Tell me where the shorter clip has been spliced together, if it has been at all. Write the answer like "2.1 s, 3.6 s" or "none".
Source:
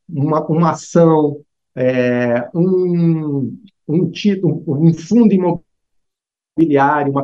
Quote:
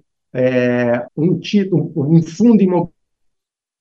1.1 s